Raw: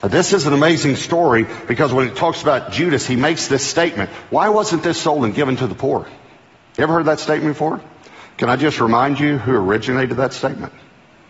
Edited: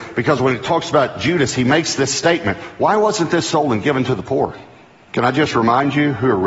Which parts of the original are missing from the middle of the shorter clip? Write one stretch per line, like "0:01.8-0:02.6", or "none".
0:06.6-0:08.3